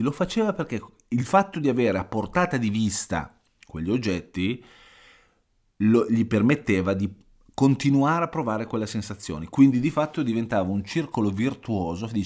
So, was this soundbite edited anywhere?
no; 0 cuts

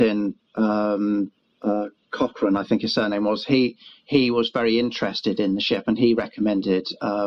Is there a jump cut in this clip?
no; 0 cuts

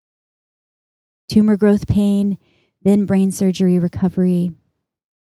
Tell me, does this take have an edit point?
no; 0 cuts

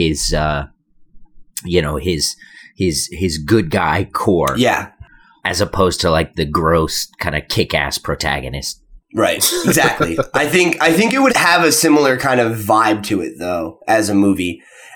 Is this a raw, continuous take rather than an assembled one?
no; 2 cuts; at 5.4 s, 11.3 s

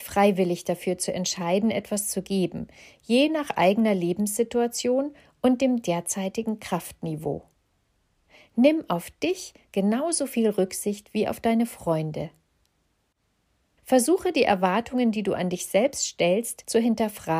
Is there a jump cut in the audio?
yes; 1 cut; at 13.8 s

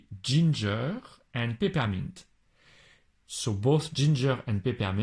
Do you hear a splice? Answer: yes; 1 cut; at 3.2 s

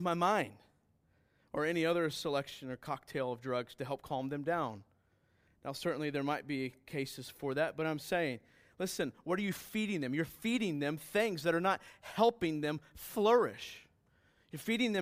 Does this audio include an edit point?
no; 0 cuts

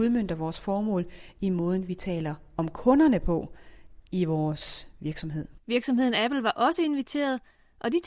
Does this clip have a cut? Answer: yes; 1 cut; at 5.6 s

